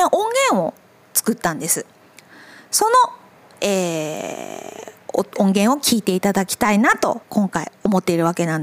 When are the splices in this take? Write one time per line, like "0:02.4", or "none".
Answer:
0:07.2